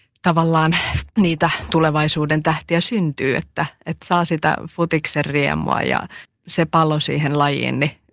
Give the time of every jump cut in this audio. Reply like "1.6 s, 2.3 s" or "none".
1.1 s